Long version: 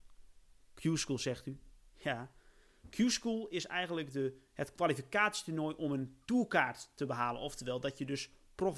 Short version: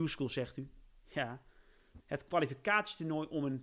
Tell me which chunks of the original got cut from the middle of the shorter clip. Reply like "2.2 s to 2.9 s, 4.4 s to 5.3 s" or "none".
2.9 s to 4.5 s